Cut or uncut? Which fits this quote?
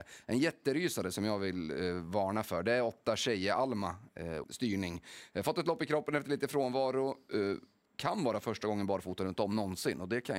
cut